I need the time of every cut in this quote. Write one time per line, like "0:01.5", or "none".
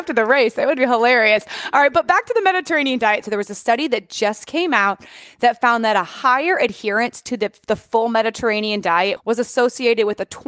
0:03.2
0:09.2

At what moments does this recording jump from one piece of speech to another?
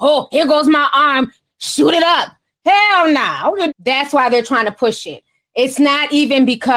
0:03.7

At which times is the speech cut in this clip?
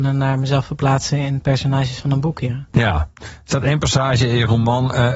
0:03.1

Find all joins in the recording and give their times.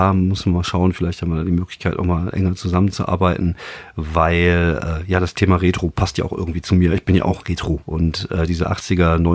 0:07.8

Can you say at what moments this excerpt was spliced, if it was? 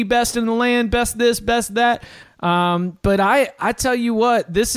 0:02.2

